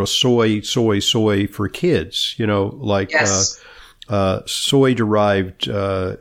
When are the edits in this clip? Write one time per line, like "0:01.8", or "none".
none

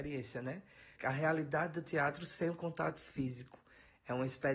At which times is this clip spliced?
0:01.0

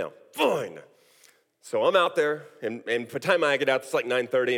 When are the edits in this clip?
none

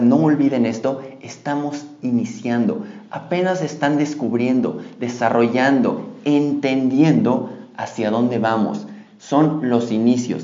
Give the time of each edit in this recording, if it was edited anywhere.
none

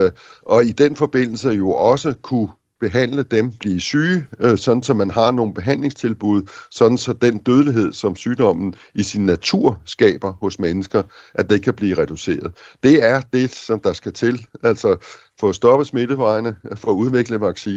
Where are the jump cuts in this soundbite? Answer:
0:03.6

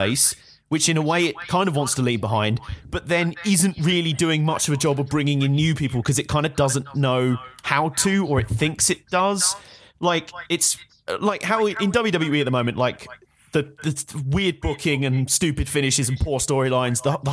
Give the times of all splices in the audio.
none

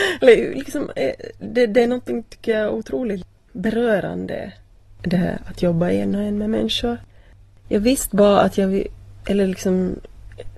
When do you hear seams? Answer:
none

